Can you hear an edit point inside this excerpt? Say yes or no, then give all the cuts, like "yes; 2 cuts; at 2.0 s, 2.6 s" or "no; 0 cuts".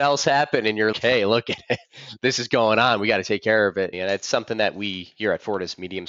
yes; 2 cuts; at 0.9 s, 3.9 s